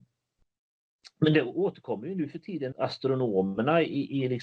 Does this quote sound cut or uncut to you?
cut